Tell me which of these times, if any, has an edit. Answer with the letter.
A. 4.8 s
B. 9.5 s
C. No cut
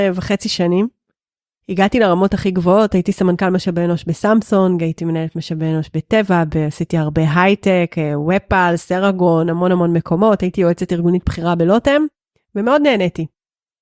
C